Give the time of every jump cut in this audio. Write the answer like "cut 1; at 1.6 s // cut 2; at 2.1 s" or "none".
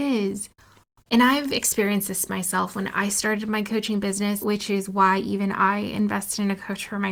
cut 1; at 1.1 s // cut 2; at 4.4 s